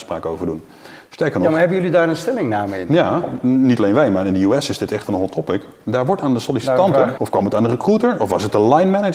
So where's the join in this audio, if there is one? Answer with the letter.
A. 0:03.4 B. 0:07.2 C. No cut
B